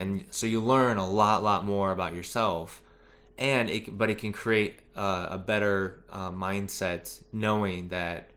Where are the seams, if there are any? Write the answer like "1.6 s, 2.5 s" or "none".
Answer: none